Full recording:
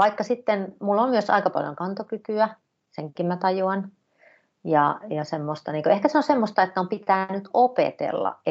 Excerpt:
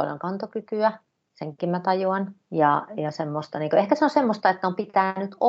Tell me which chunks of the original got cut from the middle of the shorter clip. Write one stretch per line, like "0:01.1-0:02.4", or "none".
0:04.0-0:04.5